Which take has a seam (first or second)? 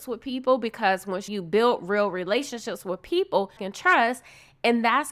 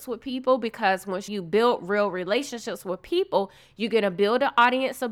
first